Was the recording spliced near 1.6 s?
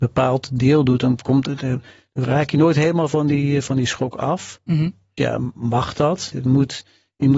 no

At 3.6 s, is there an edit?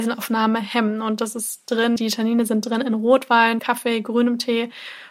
yes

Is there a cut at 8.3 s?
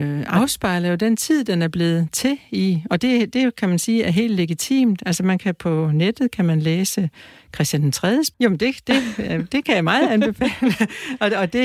yes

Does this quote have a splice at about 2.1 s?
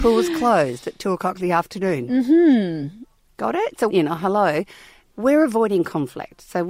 no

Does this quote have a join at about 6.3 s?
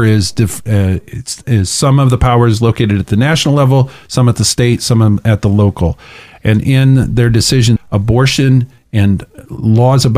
no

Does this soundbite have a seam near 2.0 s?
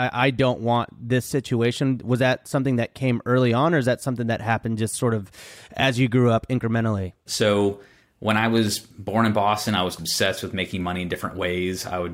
no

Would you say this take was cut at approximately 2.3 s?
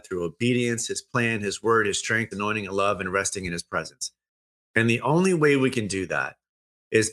yes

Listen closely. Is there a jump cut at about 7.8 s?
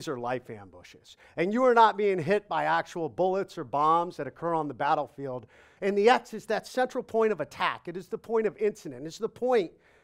no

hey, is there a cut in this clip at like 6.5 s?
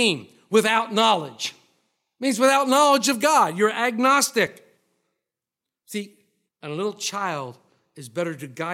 yes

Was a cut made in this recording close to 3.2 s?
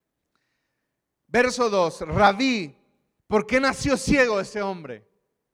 yes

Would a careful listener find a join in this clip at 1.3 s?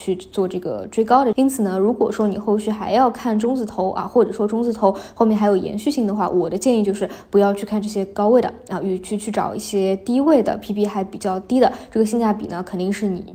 yes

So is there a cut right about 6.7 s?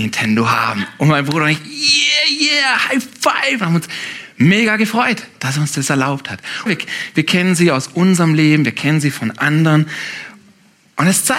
yes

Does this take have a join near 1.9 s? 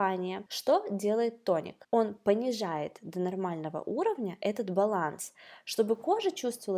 no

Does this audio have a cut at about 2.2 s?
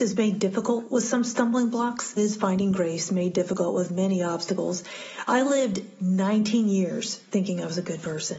yes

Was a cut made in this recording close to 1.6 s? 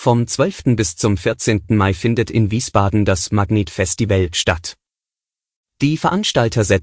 no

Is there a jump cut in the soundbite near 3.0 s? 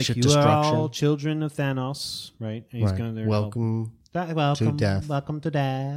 no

